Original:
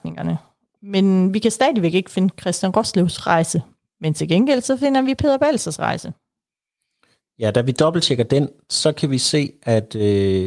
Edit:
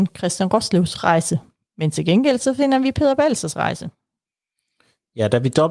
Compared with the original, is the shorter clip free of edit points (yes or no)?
yes